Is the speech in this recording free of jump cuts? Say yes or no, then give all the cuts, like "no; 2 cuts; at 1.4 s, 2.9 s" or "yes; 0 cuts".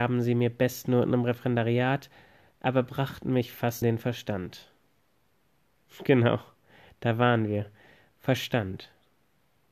no; 1 cut; at 3.8 s